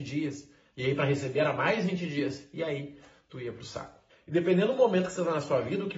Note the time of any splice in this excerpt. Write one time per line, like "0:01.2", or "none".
0:04.1